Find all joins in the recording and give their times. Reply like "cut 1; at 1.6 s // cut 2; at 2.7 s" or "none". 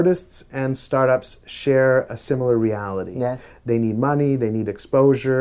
none